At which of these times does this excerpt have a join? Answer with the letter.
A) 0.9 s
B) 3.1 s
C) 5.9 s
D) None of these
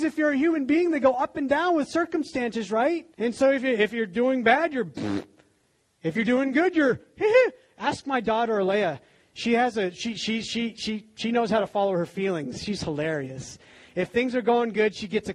B